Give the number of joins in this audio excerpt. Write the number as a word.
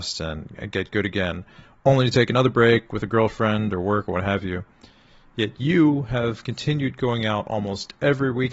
zero